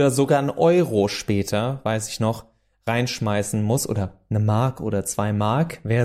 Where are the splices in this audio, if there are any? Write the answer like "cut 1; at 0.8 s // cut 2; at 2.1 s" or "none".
none